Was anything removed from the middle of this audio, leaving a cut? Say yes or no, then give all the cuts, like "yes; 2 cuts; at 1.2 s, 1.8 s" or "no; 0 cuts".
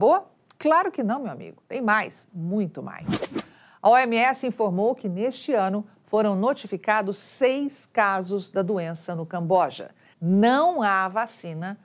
yes; 1 cut; at 10.1 s